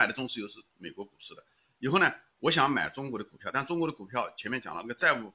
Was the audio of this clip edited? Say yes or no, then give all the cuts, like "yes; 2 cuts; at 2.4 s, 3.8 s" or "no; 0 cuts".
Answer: no; 0 cuts